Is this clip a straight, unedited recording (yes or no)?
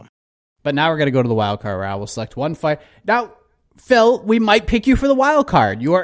yes